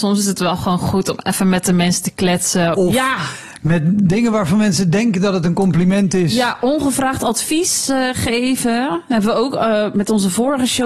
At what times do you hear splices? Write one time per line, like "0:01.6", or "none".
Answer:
0:02.7